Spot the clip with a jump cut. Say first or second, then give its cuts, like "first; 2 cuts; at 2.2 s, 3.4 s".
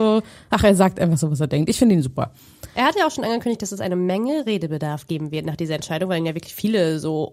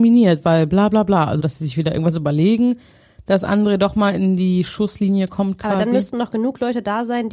second; 1 cut; at 1.4 s